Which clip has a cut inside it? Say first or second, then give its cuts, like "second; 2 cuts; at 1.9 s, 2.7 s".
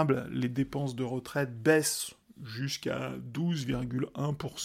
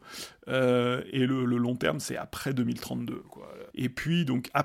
second; 1 cut; at 3.7 s